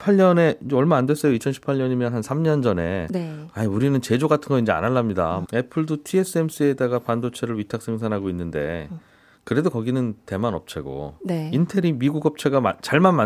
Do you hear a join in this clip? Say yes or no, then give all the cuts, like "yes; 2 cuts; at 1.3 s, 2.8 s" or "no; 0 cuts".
yes; 1 cut; at 5.4 s